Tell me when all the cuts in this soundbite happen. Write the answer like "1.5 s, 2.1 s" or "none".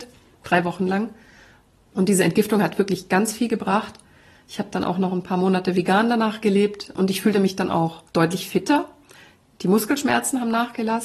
8.1 s